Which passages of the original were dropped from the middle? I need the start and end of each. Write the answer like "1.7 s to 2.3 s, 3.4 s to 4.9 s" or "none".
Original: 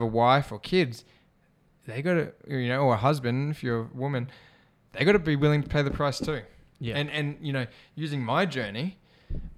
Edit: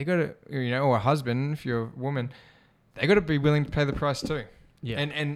none

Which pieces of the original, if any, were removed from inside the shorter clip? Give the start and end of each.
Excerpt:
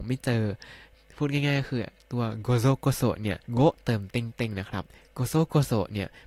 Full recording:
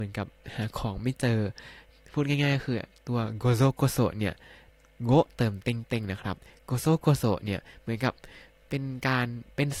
4.4 s to 5.0 s

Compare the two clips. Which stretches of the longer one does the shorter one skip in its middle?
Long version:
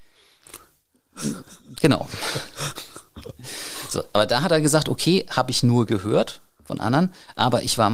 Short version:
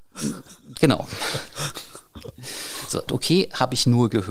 4.1 s to 4.8 s

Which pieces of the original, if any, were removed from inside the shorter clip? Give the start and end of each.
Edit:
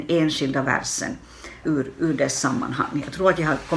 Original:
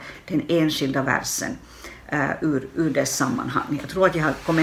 2.0 s to 2.4 s

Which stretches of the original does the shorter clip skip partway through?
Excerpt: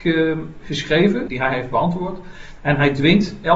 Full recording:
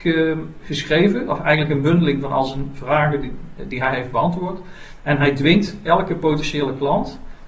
1.3 s to 3.7 s

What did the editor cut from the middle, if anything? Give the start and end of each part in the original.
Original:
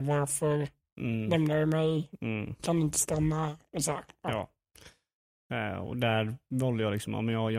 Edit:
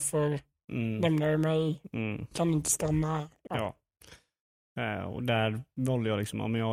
3.7 s to 4.2 s

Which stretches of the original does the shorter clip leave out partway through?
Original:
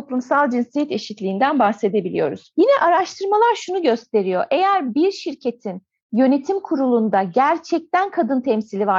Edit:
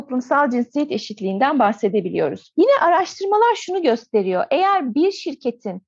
none

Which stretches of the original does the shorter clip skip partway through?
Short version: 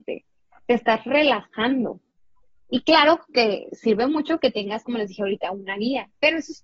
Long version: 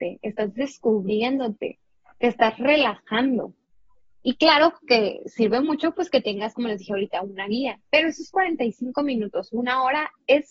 5.9 s to 6.1 s

